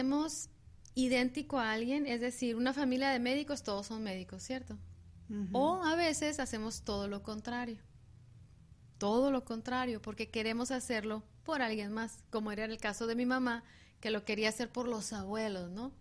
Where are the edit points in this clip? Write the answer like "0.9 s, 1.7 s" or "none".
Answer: none